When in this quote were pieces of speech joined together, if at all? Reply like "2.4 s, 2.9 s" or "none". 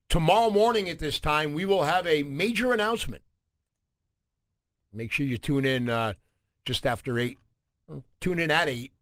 none